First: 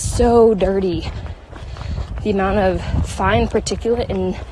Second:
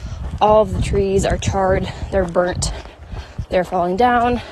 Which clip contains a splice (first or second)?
second